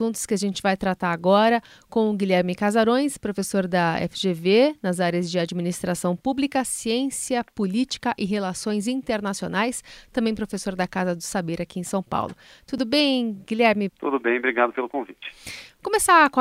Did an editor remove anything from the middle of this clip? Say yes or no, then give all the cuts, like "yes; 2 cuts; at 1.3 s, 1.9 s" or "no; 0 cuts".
yes; 1 cut; at 13.9 s